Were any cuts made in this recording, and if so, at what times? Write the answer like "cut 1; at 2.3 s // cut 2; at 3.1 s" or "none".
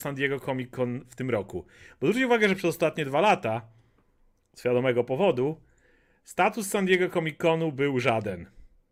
none

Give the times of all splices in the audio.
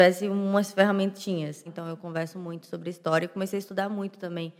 cut 1; at 1.7 s

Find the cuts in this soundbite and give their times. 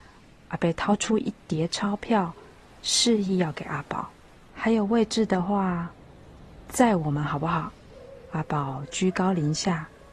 cut 1; at 4.5 s // cut 2; at 7.8 s

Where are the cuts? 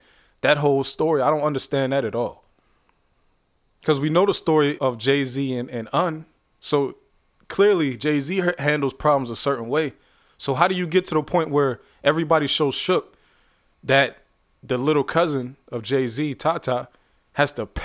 cut 1; at 4.8 s

